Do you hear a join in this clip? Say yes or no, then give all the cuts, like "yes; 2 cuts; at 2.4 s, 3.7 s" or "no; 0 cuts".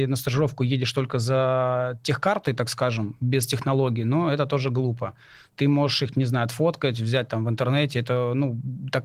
no; 0 cuts